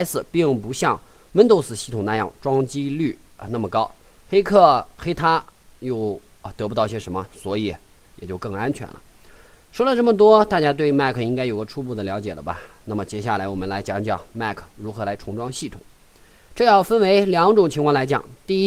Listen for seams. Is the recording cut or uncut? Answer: uncut